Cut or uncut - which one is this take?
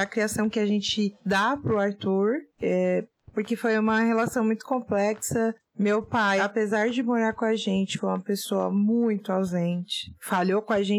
uncut